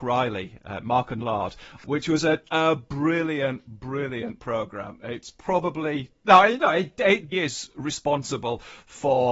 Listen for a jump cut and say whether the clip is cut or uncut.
cut